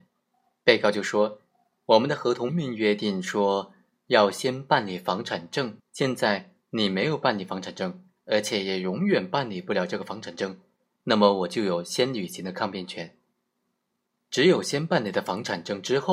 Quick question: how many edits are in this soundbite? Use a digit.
2